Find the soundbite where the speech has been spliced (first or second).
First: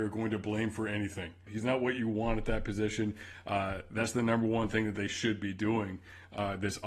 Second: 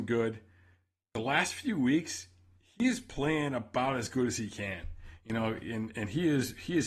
first